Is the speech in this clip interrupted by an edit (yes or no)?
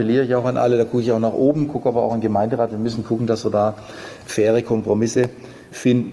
no